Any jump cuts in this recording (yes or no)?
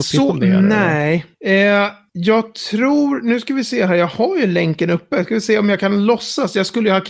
yes